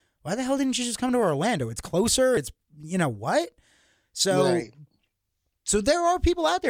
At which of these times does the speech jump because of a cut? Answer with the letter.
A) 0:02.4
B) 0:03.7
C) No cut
C